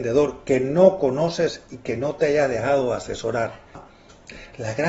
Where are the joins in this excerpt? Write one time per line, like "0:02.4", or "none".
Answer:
0:03.7